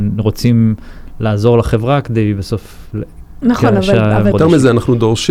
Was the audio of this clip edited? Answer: yes; 1 cut; at 4.3 s

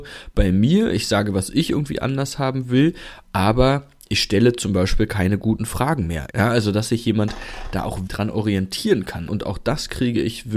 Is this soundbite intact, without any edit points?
no; 3 cuts; at 6.3 s, 8.1 s, 9.3 s

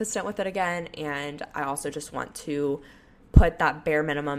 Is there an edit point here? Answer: no; 0 cuts

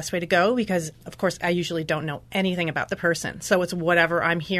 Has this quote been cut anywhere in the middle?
yes; 1 cut; at 0.9 s

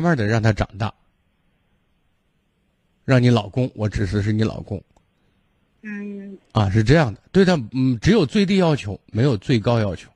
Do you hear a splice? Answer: no; 0 cuts

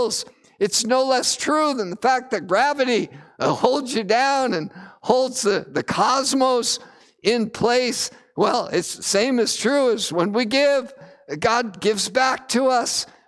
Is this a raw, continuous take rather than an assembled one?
yes; 0 cuts

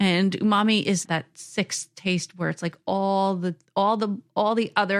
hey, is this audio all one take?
no; 1 cut; at 1.1 s

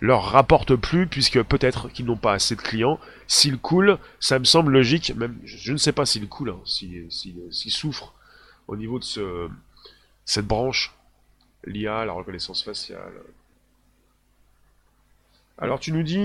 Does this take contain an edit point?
no; 0 cuts

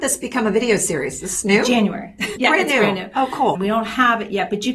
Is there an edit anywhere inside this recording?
yes; 2 cuts; at 2.4 s, 3.6 s

